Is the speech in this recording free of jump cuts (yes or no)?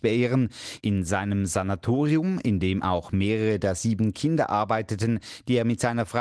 yes